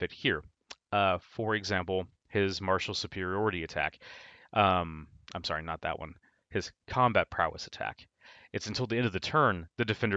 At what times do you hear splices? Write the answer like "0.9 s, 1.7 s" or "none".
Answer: none